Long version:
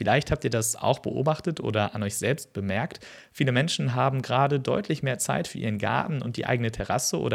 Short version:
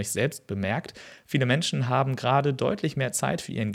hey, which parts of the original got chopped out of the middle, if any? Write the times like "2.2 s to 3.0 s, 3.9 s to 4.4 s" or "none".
none